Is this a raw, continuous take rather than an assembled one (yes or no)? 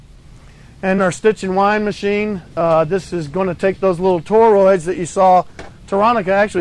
no